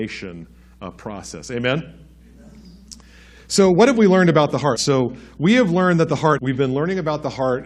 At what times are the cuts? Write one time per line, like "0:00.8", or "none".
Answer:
0:04.8
0:06.4